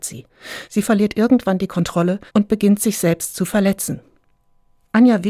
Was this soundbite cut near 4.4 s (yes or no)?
no